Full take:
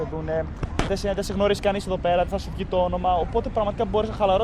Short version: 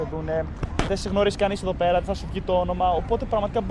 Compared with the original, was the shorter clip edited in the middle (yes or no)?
yes